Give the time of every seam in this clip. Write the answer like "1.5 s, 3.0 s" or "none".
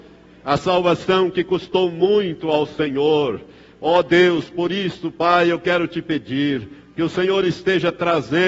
none